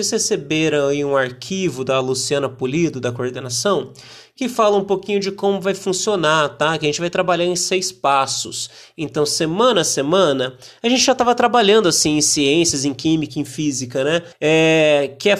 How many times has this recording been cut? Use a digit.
1